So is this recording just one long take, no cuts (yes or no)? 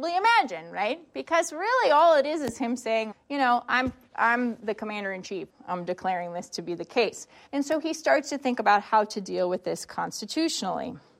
no